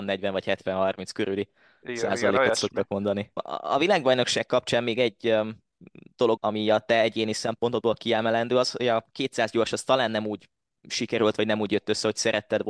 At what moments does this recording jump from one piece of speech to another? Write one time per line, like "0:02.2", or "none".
0:03.4
0:06.4